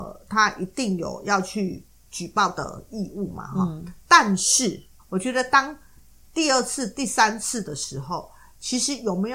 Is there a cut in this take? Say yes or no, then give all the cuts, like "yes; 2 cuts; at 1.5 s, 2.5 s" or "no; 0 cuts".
yes; 1 cut; at 5.0 s